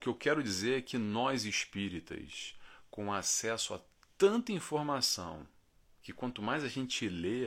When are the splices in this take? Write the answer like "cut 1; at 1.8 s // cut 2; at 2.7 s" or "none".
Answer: none